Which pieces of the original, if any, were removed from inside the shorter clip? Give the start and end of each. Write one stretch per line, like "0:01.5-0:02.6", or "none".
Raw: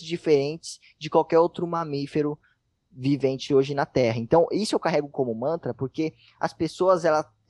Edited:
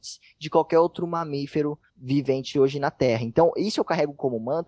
0:02.5-0:02.8